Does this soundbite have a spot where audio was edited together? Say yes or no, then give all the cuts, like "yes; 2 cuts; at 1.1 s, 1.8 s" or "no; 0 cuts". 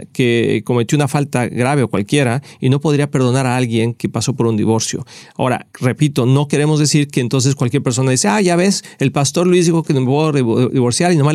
yes; 1 cut; at 5.7 s